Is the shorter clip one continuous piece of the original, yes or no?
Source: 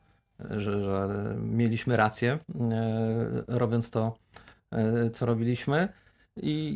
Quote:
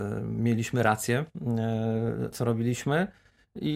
no